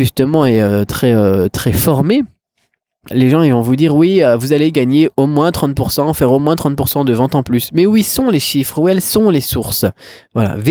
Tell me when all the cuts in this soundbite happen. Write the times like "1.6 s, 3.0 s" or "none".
3.1 s